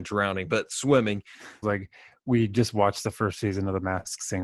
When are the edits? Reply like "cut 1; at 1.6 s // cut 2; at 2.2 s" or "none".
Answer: cut 1; at 1.6 s